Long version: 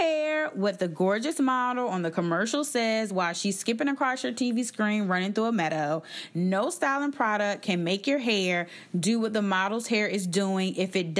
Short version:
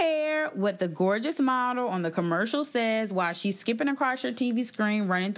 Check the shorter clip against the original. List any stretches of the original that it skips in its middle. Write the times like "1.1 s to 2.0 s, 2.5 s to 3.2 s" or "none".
none